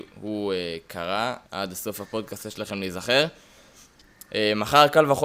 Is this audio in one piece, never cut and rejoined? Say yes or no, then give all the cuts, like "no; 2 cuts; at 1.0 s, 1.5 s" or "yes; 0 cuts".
no; 1 cut; at 1.4 s